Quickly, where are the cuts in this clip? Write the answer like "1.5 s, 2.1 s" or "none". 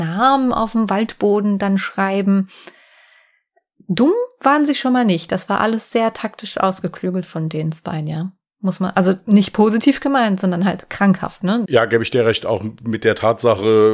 11.7 s